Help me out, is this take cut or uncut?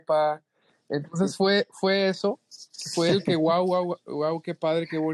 uncut